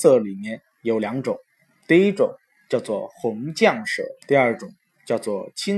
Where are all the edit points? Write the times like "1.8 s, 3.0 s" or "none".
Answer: 4.2 s